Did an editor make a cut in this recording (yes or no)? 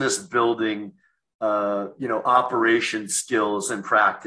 no